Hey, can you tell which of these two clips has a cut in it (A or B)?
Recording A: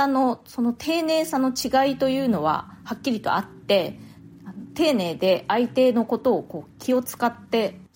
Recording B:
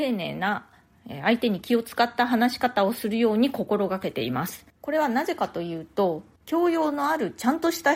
B